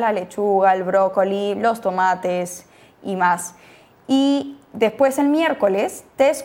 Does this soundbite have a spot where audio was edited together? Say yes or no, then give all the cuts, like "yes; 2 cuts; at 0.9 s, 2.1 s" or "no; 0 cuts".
no; 0 cuts